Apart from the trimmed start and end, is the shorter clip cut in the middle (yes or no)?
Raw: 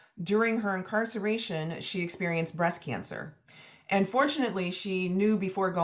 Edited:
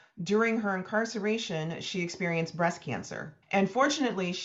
yes